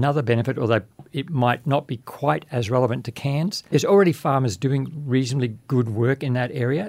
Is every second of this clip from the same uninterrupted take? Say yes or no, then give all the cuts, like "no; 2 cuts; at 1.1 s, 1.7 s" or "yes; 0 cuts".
no; 1 cut; at 3.7 s